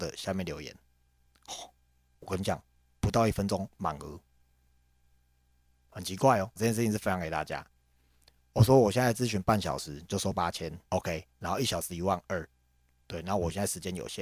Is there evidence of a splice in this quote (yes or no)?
yes